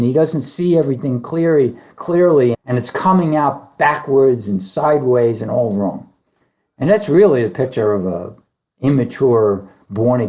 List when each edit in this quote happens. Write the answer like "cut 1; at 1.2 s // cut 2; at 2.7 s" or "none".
cut 1; at 2.5 s